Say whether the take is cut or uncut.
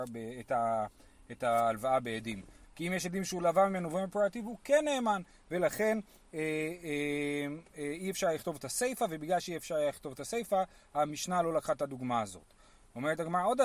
cut